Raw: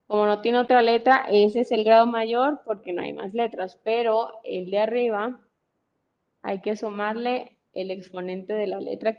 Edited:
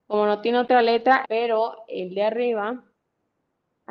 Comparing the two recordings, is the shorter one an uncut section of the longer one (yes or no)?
no